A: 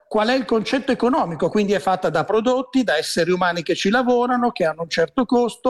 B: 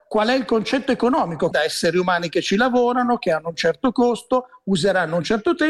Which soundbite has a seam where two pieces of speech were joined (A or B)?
B